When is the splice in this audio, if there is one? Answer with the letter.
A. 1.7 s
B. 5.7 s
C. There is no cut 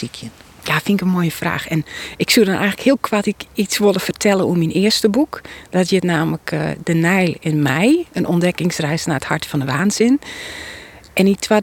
C